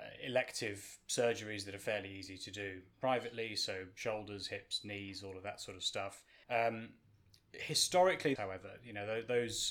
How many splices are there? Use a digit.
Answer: 2